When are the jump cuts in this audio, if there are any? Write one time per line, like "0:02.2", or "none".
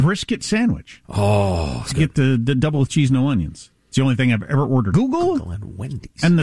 0:01.9
0:03.8
0:04.9